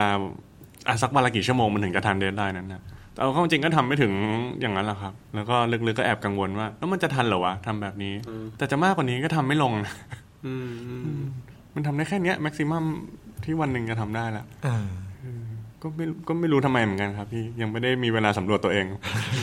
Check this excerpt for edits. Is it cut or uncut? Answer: cut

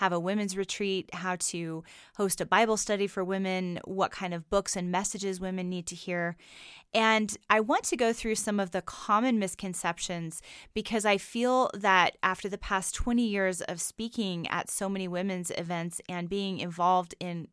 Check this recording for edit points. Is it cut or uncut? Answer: uncut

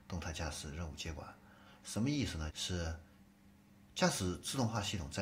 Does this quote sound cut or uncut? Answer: cut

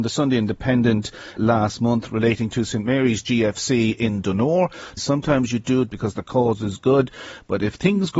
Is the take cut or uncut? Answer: cut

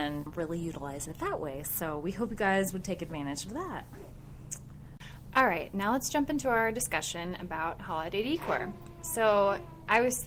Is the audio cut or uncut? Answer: uncut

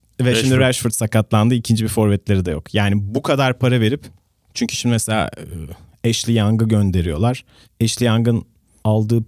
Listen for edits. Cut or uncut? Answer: uncut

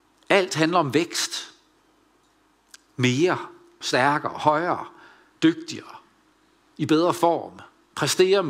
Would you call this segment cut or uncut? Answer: cut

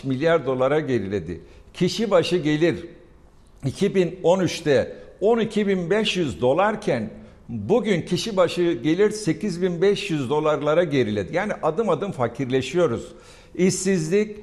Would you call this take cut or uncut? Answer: uncut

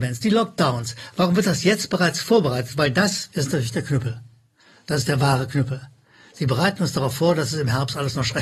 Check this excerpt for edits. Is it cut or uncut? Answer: cut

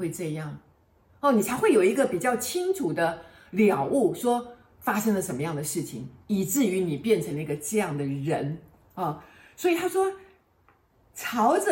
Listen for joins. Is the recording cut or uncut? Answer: cut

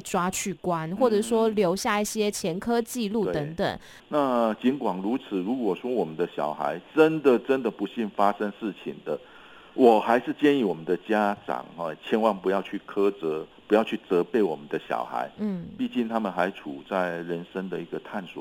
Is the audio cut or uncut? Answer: cut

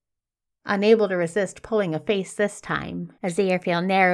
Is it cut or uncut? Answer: cut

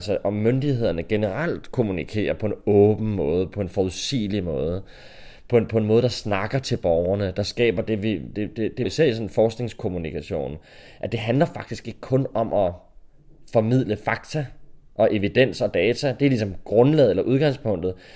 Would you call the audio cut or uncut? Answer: cut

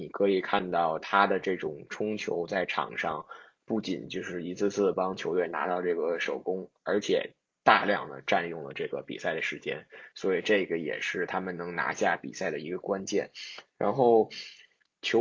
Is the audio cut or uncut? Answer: uncut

